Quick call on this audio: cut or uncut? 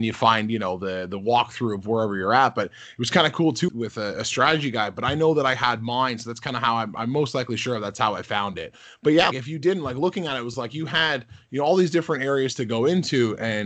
cut